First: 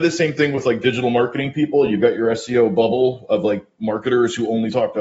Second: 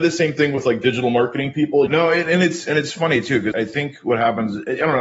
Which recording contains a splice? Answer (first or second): second